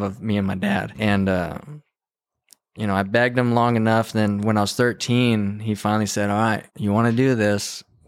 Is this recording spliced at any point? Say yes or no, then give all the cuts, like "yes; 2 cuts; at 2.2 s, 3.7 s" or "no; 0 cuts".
yes; 2 cuts; at 0.9 s, 6.7 s